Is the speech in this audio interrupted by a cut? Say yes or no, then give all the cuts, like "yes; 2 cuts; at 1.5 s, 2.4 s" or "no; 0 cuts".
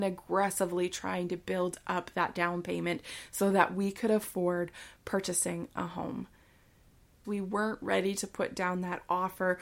yes; 1 cut; at 7.2 s